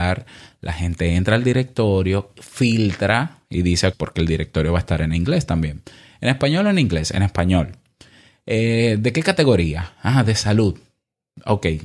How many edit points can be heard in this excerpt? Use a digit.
1